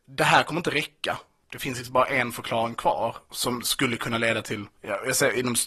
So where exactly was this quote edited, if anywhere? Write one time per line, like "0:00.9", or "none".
none